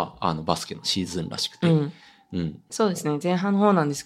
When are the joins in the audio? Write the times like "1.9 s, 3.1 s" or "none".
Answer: 2.7 s